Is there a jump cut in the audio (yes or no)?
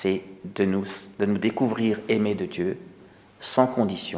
no